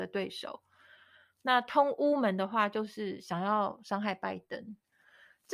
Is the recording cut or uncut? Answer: uncut